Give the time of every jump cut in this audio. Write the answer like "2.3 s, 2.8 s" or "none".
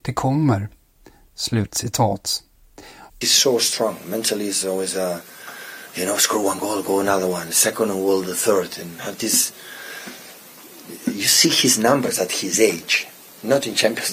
3.1 s